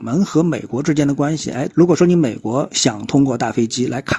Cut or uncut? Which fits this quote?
cut